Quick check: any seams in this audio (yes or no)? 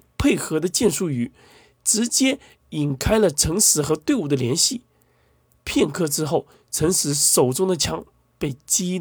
no